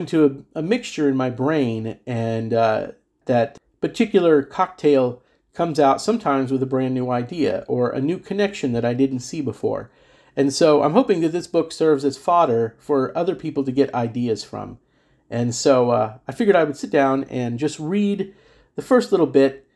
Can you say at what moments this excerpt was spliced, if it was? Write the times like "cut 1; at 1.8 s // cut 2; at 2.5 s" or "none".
none